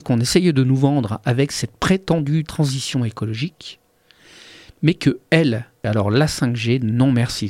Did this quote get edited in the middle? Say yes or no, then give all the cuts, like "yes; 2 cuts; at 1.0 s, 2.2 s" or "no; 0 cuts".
yes; 1 cut; at 5.8 s